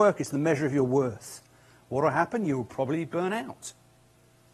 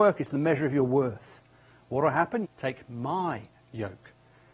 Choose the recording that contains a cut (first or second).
second